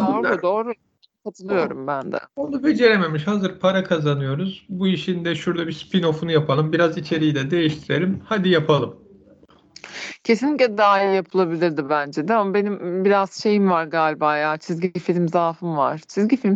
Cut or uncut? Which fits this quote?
uncut